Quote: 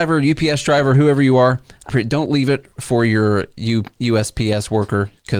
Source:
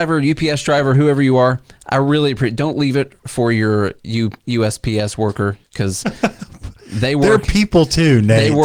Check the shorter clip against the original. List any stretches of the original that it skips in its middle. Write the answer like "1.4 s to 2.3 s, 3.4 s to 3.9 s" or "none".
1.9 s to 2.4 s